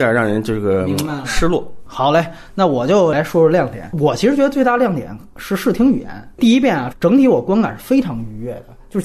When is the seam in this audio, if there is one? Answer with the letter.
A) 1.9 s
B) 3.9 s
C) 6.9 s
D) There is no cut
C